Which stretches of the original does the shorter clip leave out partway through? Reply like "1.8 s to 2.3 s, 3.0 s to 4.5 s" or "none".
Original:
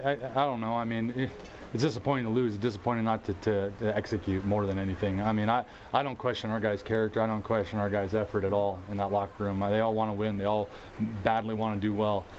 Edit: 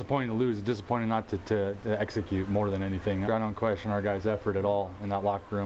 5.2 s to 7.1 s